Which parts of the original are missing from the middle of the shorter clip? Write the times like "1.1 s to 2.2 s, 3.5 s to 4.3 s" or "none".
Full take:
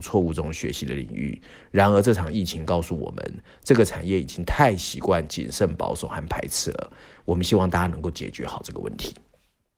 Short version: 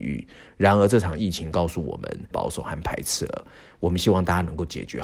3.4 s to 5.8 s